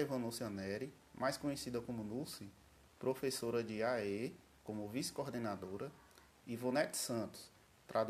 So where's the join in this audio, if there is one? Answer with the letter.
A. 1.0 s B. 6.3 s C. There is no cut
B